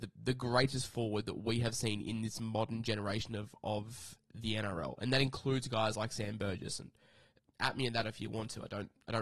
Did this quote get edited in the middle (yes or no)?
no